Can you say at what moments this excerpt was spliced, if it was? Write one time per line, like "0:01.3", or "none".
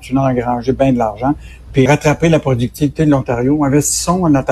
0:01.9